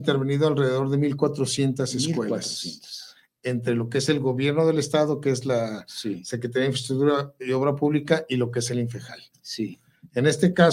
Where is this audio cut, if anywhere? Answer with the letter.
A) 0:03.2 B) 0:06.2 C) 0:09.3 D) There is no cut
D